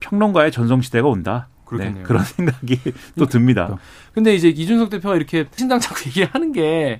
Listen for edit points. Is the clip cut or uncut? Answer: cut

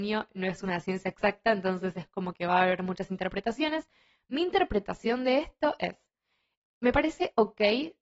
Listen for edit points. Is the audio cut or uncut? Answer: uncut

